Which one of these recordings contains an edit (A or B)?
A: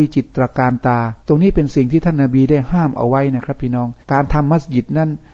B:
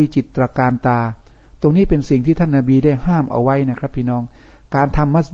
A